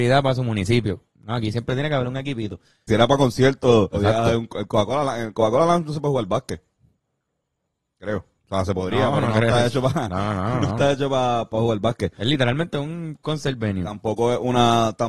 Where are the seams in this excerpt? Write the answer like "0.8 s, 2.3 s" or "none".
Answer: 2.9 s, 3.9 s